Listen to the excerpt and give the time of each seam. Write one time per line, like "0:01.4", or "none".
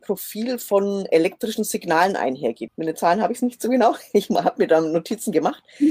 0:02.7